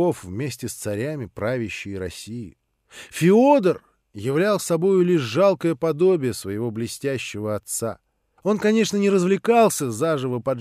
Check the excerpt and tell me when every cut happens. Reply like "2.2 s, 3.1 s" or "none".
8.4 s